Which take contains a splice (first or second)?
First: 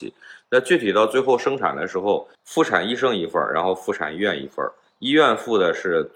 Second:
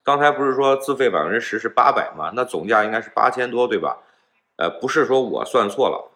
first